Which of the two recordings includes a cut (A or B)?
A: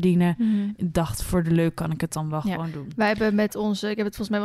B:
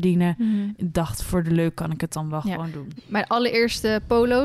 B